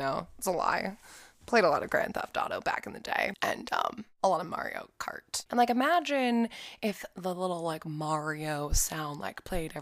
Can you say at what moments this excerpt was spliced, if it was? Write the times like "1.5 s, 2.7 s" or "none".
5.5 s